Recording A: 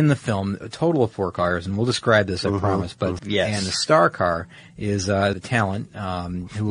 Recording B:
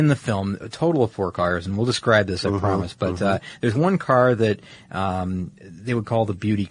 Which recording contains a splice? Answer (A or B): A